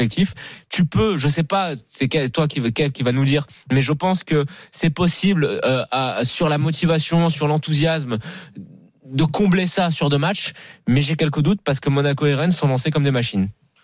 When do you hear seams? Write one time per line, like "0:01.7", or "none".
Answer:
none